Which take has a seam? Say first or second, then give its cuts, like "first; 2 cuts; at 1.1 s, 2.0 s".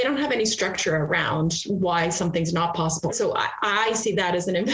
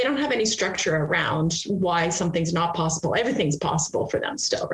first; 1 cut; at 3.1 s